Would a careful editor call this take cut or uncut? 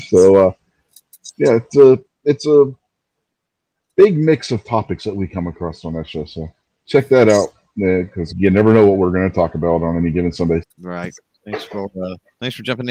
cut